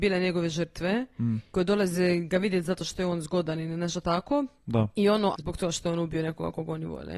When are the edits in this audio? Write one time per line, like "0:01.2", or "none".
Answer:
0:05.3